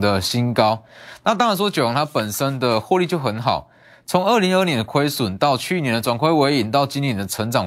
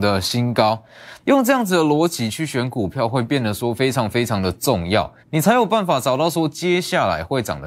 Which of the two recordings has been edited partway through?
second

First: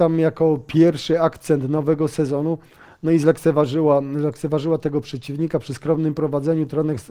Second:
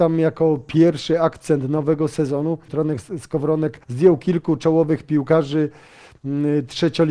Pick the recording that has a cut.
second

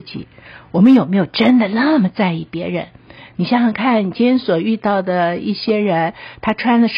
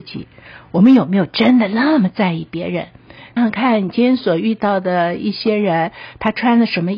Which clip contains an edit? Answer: second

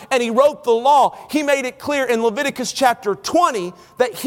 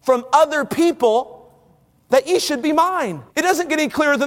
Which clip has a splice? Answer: second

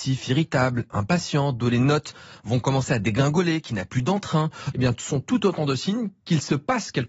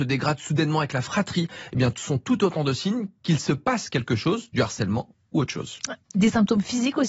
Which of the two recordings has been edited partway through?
first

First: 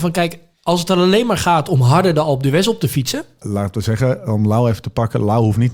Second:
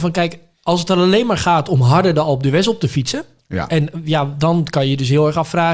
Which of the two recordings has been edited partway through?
first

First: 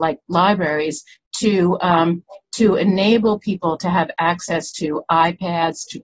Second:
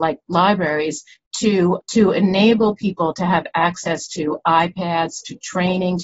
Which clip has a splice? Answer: second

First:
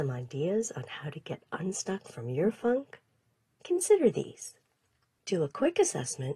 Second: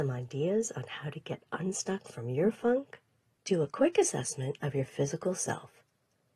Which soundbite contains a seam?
second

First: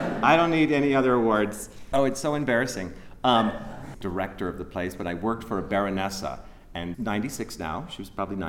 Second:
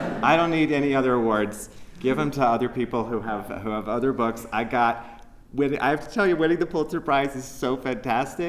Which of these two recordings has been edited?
first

